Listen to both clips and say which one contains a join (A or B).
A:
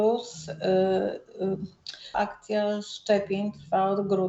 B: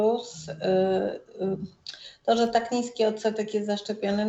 A